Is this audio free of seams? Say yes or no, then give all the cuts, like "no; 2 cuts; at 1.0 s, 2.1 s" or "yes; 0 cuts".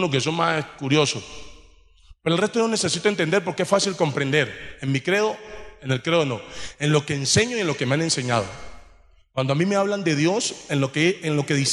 yes; 0 cuts